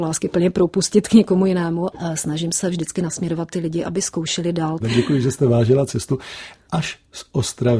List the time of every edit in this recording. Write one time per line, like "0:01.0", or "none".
0:01.9
0:04.8